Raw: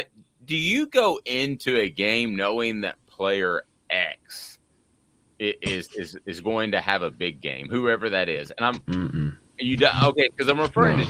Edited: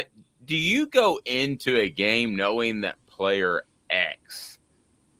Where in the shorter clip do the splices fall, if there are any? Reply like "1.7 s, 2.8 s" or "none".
none

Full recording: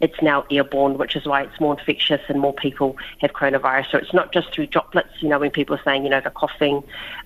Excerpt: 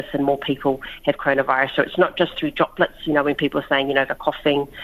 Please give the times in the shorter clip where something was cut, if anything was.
none

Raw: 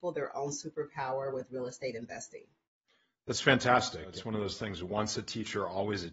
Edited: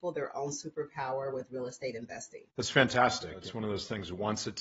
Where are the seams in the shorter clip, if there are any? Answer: 2.5 s

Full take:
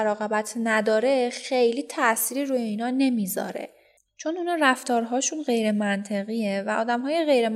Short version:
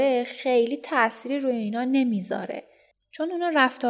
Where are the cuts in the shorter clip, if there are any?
none

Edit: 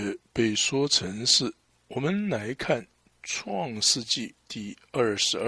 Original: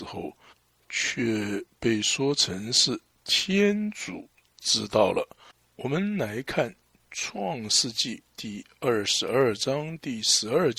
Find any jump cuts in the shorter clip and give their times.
1.7 s

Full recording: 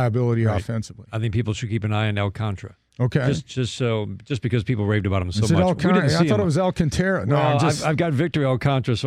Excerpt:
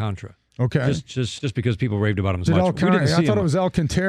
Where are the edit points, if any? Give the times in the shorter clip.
1.4 s, 2.5 s

